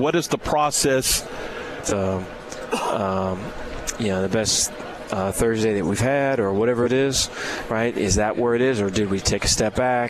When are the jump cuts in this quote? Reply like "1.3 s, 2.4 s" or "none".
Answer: 1.8 s